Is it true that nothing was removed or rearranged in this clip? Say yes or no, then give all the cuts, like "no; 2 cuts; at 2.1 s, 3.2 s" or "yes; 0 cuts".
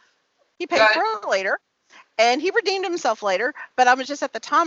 yes; 0 cuts